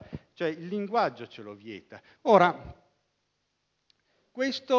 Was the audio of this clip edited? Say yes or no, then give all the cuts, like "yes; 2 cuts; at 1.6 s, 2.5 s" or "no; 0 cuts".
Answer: yes; 1 cut; at 2.2 s